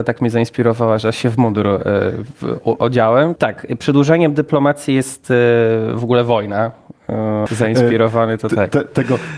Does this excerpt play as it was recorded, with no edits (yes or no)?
no